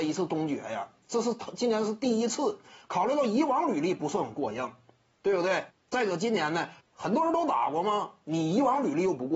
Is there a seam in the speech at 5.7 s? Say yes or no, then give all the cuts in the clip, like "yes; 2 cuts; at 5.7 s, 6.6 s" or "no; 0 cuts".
yes; 2 cuts; at 5.7 s, 6.8 s